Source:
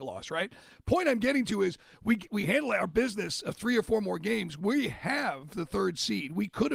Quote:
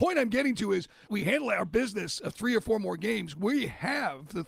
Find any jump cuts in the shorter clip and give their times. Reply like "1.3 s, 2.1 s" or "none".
1.1 s